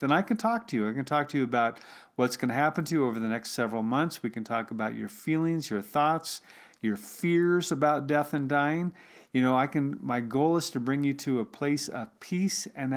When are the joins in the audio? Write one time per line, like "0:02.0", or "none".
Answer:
none